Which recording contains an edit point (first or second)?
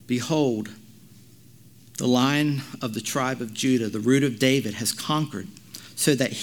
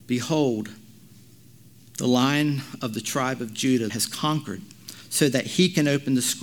second